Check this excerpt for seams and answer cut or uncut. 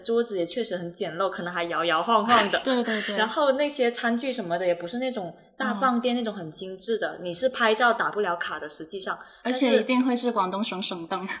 uncut